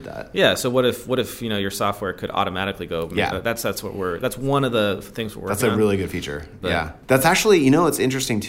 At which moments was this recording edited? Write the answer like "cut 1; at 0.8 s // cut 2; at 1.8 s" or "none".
cut 1; at 3.3 s